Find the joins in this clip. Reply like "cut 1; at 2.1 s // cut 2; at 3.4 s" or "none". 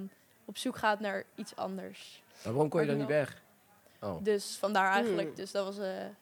cut 1; at 3.9 s